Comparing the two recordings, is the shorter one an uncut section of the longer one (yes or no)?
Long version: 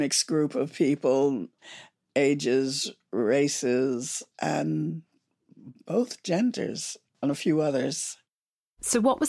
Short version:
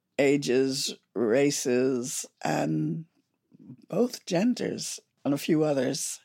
yes